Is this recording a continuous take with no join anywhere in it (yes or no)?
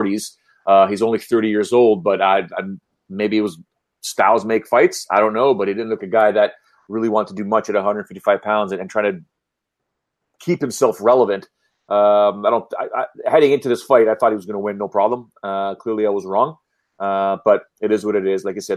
no